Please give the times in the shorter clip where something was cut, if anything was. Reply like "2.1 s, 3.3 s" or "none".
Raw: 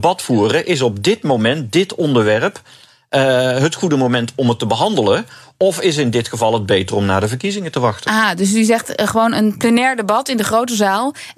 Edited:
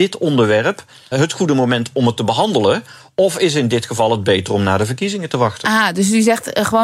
1.1 s